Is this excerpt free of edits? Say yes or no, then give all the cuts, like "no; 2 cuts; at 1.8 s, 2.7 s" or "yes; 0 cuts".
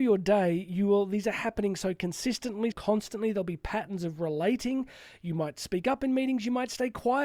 no; 1 cut; at 2.7 s